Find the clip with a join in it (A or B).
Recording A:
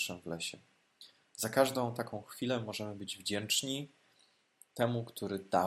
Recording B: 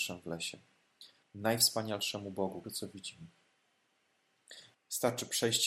B